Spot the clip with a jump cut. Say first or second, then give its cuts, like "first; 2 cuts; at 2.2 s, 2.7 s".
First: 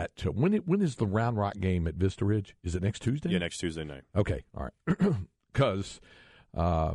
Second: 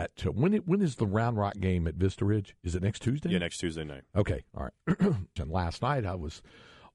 second; 1 cut; at 5.4 s